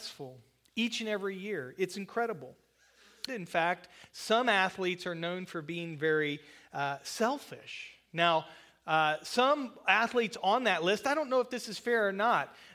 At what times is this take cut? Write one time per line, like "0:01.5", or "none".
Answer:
0:03.3